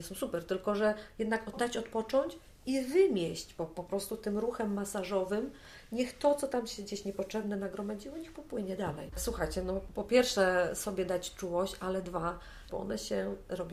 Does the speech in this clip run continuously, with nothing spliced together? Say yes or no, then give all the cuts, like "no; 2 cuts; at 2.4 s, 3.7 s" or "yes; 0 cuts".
no; 2 cuts; at 9.1 s, 12.7 s